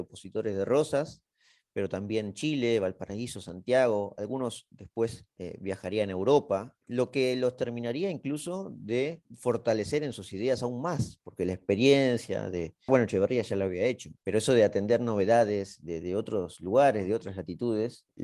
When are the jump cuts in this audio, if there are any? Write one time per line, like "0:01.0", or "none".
0:12.9

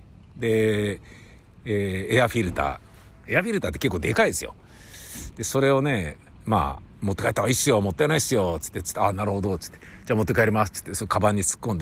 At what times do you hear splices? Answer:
0:08.8

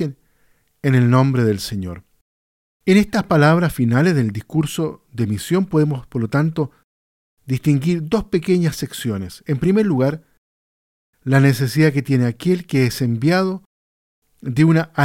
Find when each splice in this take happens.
none

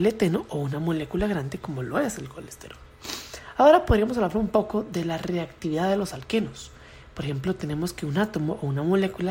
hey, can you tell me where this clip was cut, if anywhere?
none

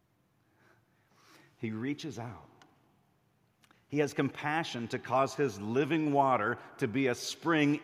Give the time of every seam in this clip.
none

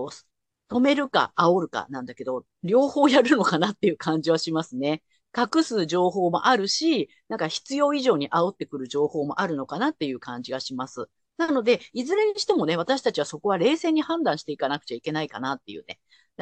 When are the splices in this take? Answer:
none

